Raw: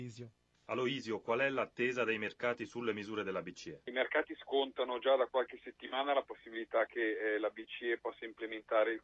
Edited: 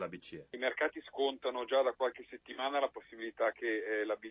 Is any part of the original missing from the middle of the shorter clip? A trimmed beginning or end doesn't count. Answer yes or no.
no